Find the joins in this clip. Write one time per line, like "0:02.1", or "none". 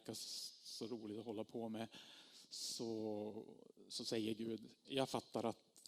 0:04.9